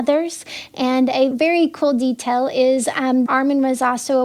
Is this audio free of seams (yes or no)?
no